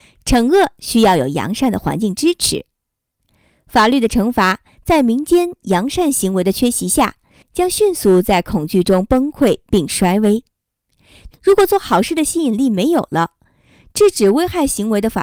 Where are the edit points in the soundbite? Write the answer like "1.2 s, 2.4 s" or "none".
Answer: 11.3 s